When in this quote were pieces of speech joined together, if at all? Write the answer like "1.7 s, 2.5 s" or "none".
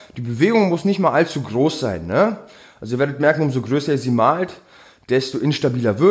none